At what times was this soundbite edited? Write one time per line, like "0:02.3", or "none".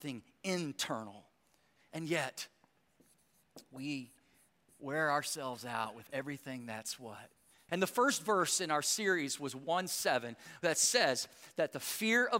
0:07.7